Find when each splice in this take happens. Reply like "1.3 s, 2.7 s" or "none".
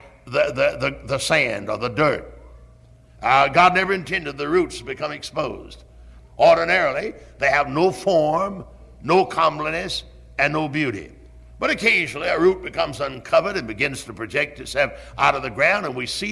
6.2 s